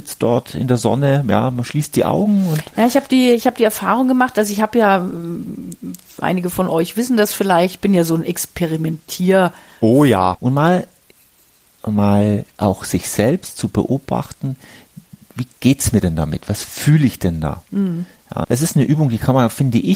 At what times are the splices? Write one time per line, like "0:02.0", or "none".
0:10.3
0:18.4